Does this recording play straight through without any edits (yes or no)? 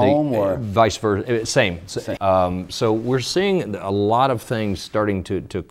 no